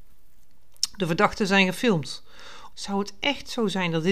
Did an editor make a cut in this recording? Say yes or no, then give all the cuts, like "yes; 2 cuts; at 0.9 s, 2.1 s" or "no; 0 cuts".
yes; 1 cut; at 2.7 s